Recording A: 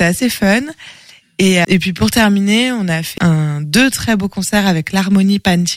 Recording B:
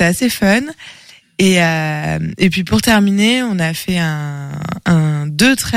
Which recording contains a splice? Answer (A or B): A